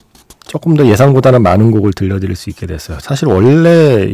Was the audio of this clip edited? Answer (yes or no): yes